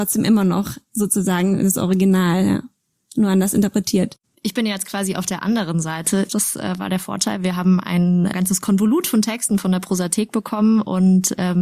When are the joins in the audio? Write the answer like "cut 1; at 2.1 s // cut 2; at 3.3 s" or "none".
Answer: cut 1; at 6.3 s // cut 2; at 8.3 s